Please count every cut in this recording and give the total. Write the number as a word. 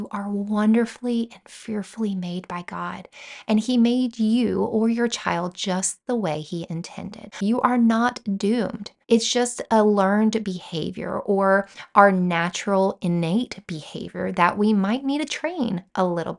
two